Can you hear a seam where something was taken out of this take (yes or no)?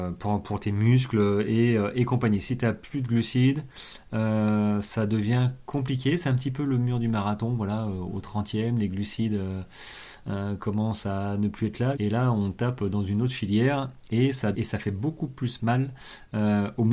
yes